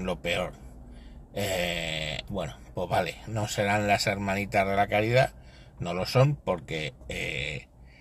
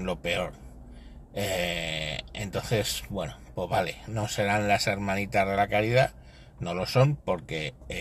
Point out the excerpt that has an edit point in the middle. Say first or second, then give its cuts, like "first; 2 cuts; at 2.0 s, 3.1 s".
first; 1 cut; at 2.3 s